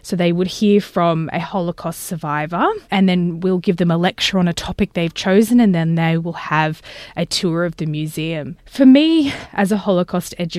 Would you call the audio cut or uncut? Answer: uncut